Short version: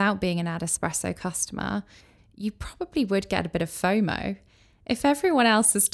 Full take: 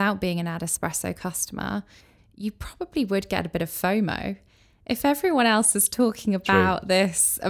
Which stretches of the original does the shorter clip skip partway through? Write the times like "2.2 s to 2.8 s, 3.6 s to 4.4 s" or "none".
none